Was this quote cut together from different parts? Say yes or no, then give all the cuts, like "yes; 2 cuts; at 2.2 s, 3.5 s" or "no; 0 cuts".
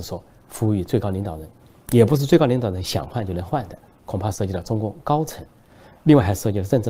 no; 0 cuts